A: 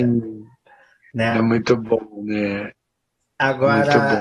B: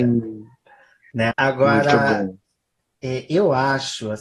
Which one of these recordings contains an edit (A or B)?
B